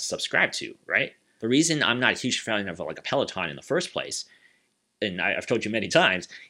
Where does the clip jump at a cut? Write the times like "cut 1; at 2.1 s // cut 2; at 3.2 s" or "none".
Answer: cut 1; at 1.4 s